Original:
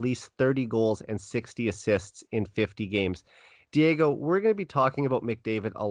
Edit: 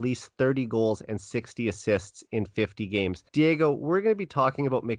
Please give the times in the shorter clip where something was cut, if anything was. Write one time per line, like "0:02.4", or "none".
0:03.3

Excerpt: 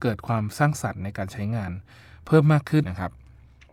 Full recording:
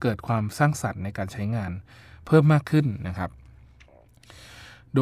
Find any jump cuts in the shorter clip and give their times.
0:02.8

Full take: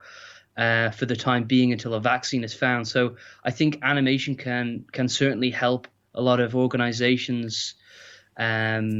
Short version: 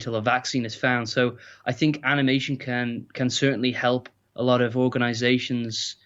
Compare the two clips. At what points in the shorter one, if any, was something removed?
none

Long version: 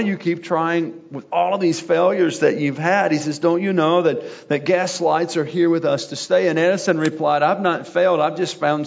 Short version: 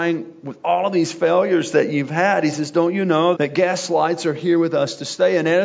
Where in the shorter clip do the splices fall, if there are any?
0:03.3

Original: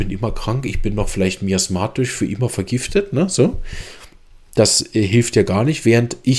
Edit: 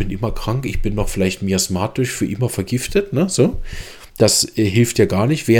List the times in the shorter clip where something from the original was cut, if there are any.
0:04.1

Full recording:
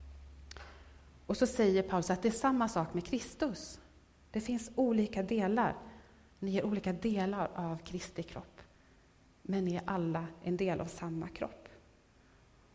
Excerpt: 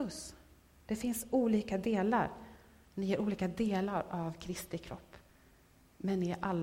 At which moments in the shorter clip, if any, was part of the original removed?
none

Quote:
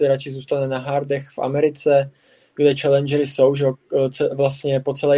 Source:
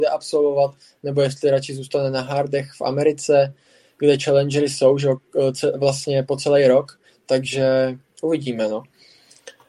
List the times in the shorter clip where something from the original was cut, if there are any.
none

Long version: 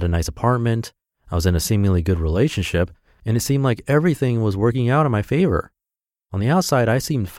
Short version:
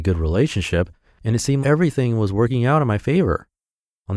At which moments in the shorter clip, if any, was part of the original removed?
0:01.6

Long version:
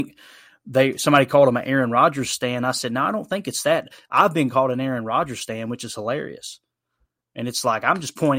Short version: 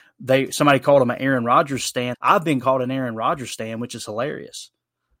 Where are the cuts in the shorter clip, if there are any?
0:02.1

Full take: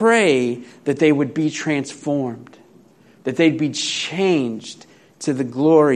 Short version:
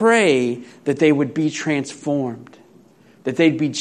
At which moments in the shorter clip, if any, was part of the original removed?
none

